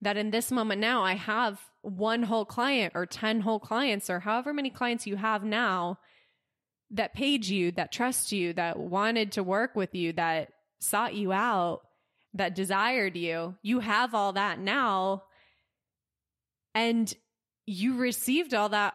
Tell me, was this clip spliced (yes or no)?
no